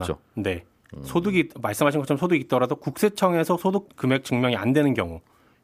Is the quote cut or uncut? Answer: cut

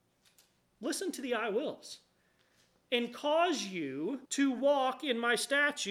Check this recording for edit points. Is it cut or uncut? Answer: cut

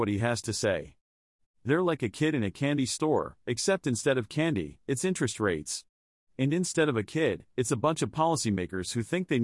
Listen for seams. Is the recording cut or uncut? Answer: cut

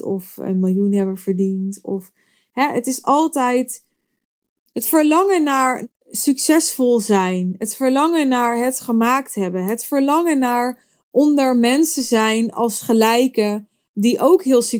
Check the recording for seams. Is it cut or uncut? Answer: uncut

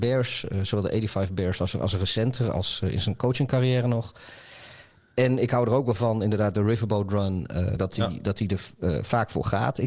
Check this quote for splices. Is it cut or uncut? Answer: cut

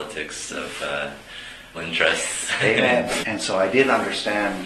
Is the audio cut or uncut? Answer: cut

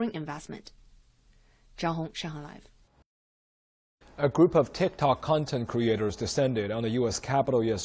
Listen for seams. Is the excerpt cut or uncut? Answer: uncut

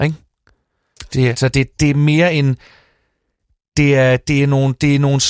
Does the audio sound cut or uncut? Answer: cut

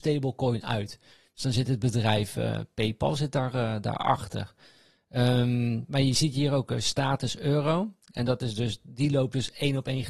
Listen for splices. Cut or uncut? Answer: uncut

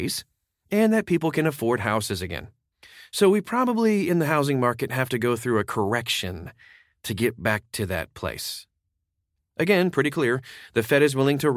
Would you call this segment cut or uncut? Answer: uncut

